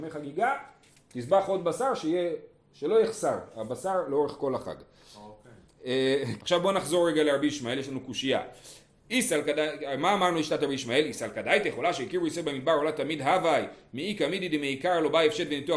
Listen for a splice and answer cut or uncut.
cut